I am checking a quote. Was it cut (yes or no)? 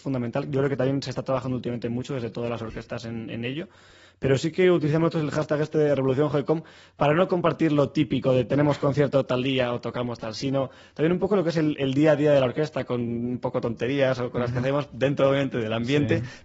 no